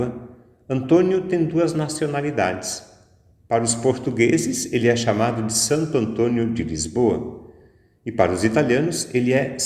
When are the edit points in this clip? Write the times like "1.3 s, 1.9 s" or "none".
none